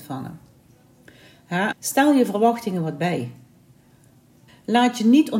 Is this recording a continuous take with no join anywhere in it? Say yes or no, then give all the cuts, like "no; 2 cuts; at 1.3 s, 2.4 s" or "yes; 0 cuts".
no; 2 cuts; at 1.7 s, 4.5 s